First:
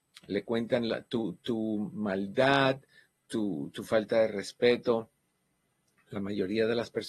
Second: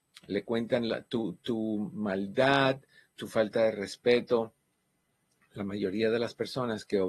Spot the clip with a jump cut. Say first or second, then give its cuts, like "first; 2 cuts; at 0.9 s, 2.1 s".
second; 1 cut; at 3.2 s